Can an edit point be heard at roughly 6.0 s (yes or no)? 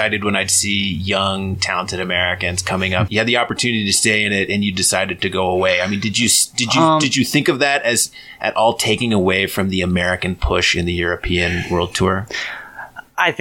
no